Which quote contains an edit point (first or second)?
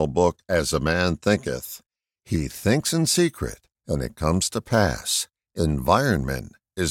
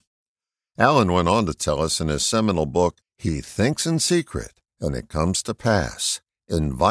second